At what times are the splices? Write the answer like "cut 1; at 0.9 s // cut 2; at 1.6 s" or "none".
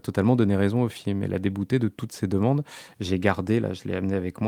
none